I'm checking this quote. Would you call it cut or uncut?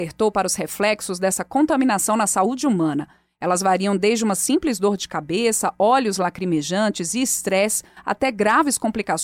uncut